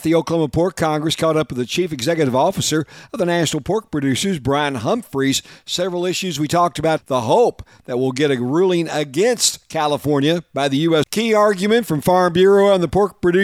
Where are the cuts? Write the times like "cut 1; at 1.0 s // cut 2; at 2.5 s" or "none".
cut 1; at 7.0 s // cut 2; at 11.0 s